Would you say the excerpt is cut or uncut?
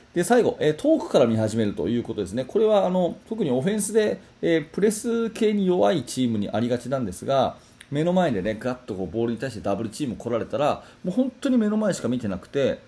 cut